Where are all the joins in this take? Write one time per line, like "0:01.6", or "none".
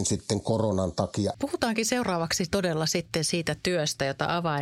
0:01.3